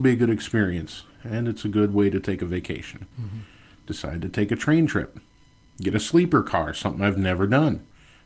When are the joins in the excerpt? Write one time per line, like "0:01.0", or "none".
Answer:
0:03.1